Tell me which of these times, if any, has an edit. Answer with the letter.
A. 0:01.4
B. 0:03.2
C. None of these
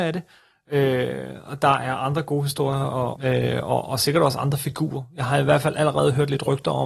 B